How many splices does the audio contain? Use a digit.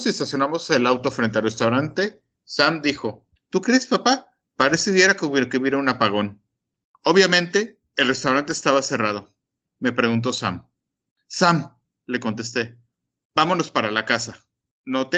1